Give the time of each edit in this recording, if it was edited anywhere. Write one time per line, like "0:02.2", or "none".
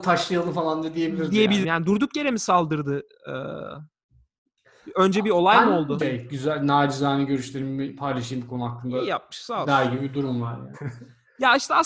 0:01.6
0:06.0
0:10.7